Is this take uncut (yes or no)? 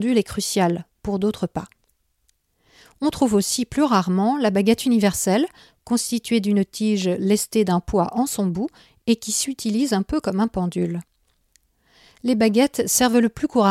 yes